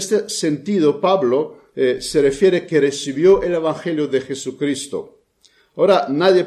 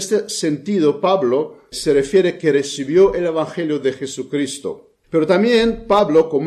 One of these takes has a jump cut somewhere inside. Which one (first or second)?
second